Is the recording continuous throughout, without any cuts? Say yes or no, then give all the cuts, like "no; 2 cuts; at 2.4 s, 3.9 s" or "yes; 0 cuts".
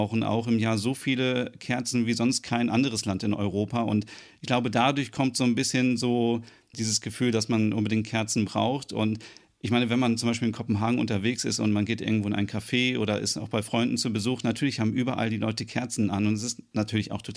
yes; 0 cuts